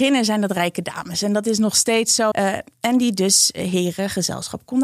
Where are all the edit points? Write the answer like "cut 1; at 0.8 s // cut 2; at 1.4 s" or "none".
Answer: cut 1; at 2.3 s